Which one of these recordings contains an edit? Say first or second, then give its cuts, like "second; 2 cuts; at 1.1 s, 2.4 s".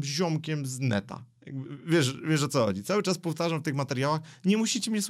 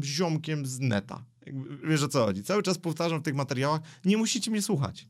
second; 1 cut; at 1.8 s